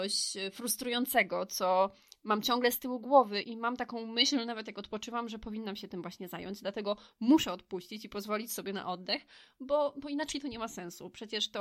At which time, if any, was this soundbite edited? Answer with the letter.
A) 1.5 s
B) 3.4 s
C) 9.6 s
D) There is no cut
B